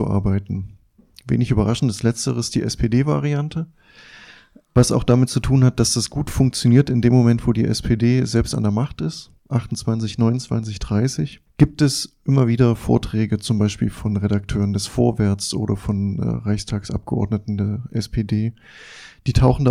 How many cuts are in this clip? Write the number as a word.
one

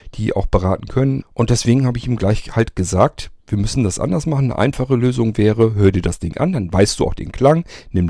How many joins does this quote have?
one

